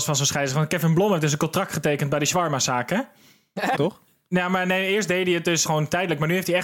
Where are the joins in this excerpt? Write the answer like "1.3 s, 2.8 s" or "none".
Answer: 3.7 s, 5.6 s